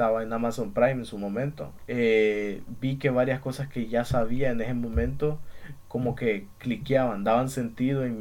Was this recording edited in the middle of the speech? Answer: yes; 1 cut; at 1.9 s

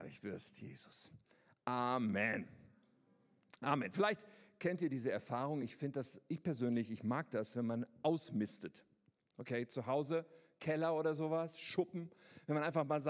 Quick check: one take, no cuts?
yes; 0 cuts

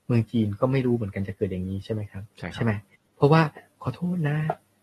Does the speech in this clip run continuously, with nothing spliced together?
no; 1 cut; at 2.3 s

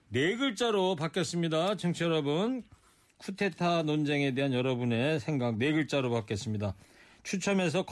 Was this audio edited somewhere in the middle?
no; 0 cuts

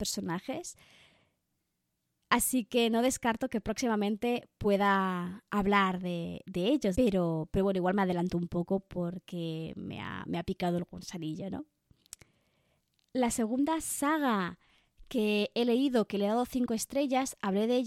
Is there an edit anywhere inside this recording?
yes; 1 cut; at 6.9 s

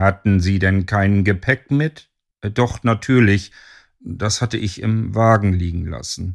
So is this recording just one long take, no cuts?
no; 1 cut; at 2.3 s

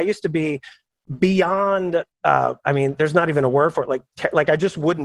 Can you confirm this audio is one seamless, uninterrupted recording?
no; 1 cut; at 2.1 s

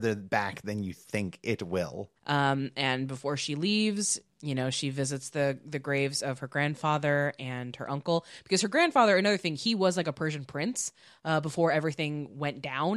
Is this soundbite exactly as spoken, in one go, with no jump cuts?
no; 2 cuts; at 2.2 s, 4.3 s

